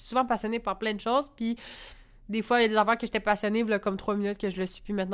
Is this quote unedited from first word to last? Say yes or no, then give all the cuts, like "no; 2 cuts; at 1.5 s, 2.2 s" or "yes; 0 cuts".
yes; 0 cuts